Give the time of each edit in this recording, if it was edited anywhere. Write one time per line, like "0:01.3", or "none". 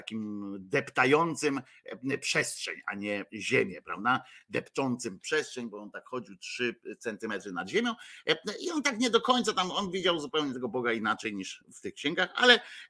none